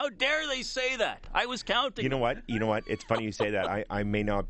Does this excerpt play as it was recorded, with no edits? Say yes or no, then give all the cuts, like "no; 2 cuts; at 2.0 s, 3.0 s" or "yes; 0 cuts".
yes; 0 cuts